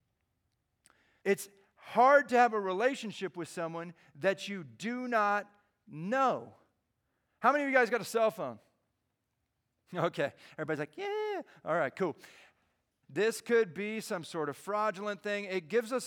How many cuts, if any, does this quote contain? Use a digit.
2